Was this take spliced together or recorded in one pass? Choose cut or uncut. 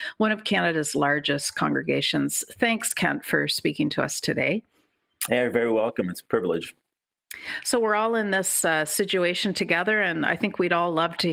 uncut